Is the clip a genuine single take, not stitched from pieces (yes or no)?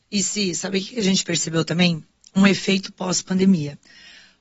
yes